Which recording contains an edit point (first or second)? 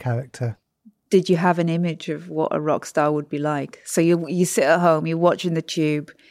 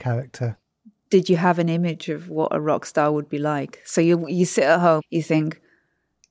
second